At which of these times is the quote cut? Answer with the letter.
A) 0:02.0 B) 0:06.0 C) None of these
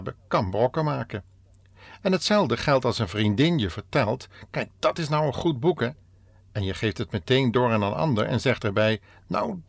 C